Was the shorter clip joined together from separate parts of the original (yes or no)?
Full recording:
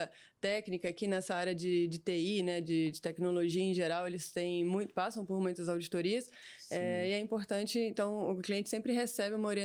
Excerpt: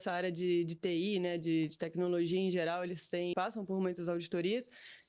yes